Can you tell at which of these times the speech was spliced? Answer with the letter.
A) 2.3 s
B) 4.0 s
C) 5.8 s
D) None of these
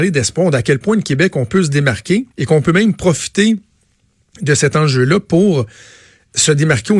A